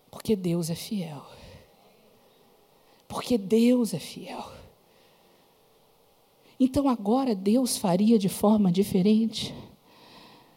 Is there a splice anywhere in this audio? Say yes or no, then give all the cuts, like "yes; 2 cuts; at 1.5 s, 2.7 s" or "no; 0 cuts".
no; 0 cuts